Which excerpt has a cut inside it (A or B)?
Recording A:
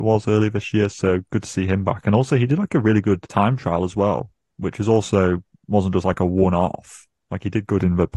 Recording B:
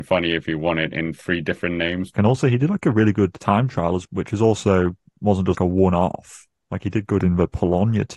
B